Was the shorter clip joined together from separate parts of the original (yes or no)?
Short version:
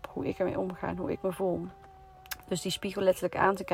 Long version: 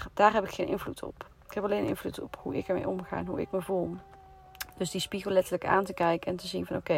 no